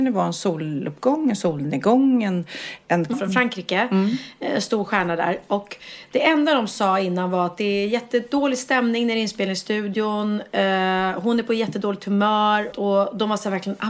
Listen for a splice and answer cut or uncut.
cut